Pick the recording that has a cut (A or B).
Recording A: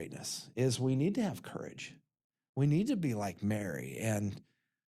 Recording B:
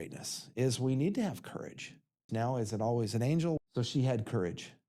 B